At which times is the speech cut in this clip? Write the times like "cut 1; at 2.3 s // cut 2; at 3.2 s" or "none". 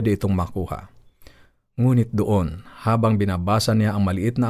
none